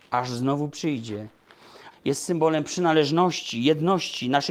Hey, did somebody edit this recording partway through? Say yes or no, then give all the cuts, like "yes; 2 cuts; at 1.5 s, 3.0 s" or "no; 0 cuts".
yes; 1 cut; at 1.9 s